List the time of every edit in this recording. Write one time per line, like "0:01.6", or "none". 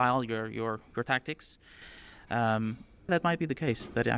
0:03.1